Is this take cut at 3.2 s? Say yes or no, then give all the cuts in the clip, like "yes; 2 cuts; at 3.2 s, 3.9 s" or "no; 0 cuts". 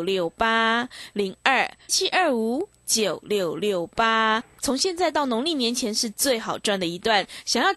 no; 1 cut; at 1.9 s